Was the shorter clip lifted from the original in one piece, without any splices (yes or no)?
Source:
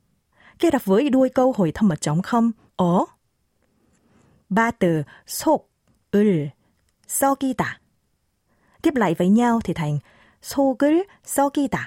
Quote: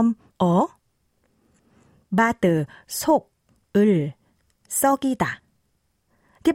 yes